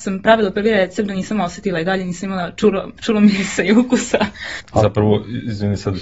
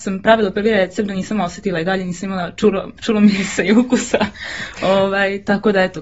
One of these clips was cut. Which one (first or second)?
first